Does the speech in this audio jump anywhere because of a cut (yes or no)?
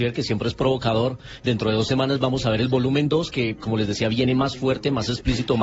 yes